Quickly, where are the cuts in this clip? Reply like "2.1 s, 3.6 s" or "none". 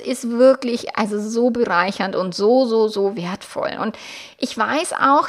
none